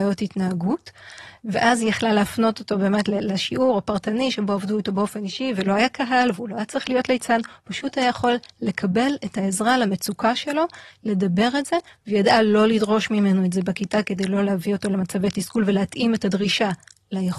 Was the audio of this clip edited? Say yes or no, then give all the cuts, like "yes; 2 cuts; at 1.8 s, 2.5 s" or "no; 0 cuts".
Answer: yes; 1 cut; at 1.4 s